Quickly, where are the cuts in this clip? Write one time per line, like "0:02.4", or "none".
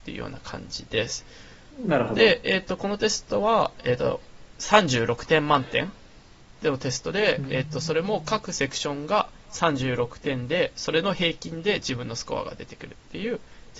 none